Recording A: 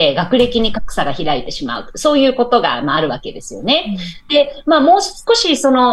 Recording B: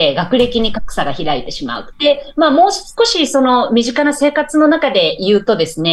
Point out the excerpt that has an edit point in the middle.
B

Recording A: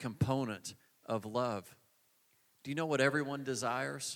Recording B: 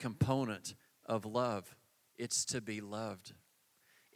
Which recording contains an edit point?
B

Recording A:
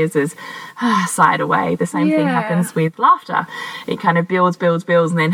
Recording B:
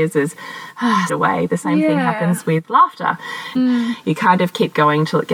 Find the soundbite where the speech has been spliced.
B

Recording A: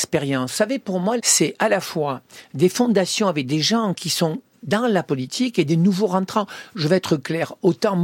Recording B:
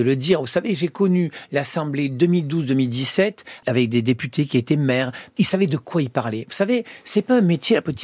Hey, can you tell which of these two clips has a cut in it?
A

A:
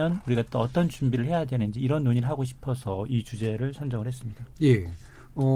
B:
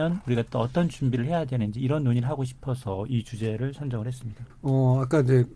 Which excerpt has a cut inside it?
B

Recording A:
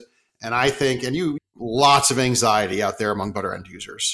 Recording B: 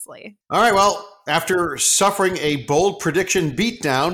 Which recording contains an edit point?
A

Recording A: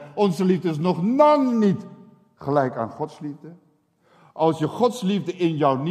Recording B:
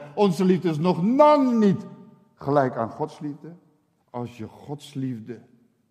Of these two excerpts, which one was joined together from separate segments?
B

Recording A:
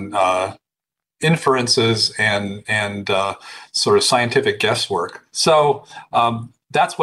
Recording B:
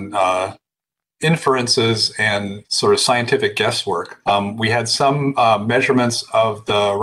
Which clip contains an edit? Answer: B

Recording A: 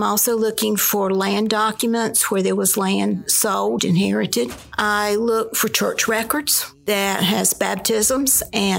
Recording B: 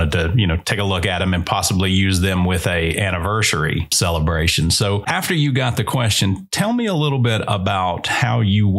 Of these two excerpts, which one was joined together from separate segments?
A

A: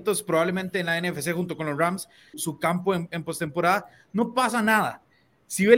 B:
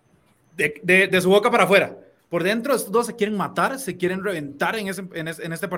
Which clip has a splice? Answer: A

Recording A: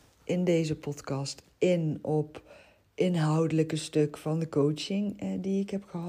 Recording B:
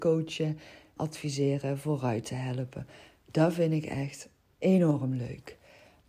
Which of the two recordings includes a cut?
B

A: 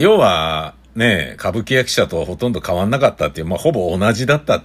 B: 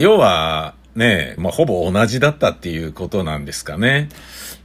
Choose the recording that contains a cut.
B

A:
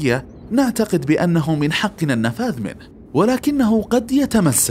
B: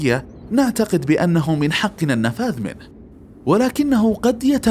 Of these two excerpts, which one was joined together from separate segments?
A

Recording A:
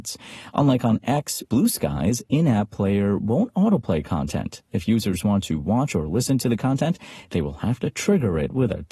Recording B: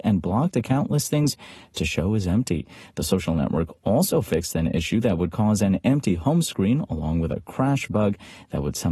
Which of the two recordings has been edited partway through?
A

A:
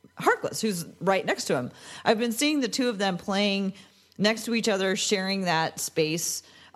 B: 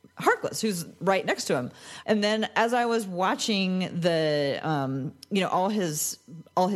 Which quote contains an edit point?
B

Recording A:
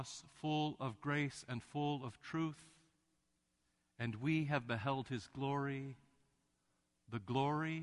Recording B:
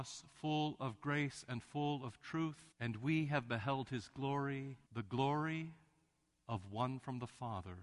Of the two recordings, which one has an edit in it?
B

